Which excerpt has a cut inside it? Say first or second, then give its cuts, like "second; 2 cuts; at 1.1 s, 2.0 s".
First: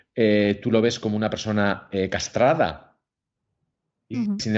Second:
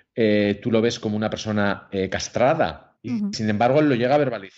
second; 1 cut; at 3.0 s